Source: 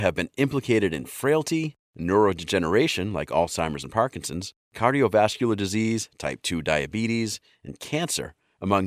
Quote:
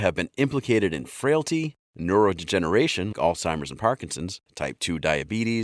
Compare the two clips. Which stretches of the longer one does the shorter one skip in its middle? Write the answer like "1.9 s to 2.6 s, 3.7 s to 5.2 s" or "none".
3.1 s to 3.3 s, 4.6 s to 6.1 s